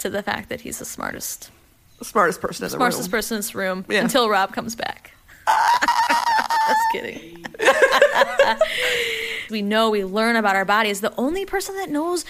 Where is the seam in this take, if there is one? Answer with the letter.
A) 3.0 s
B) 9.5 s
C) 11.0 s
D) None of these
B